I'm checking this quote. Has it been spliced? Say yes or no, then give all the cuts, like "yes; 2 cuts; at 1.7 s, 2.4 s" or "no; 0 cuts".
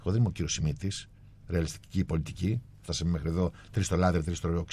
no; 0 cuts